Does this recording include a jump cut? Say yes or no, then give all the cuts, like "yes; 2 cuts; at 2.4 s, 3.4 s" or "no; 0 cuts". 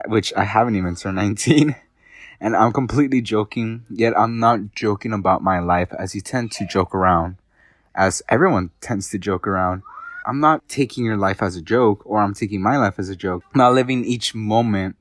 yes; 1 cut; at 10.2 s